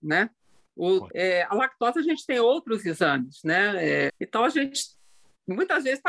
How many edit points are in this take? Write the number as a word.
two